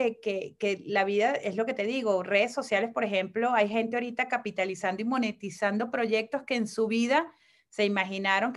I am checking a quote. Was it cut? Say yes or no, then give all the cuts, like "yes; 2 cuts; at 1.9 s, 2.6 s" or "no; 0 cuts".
no; 0 cuts